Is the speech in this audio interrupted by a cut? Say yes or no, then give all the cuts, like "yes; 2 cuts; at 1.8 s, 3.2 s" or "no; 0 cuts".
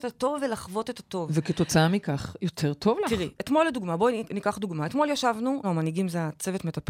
yes; 1 cut; at 5.6 s